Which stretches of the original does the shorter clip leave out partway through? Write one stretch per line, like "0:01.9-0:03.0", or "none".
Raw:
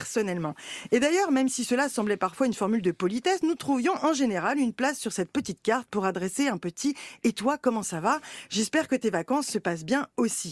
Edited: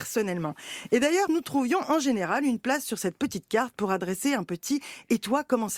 0:01.3-0:03.4